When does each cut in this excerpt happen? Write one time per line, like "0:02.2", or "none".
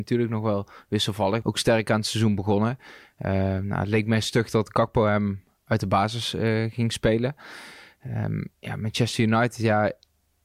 0:01.4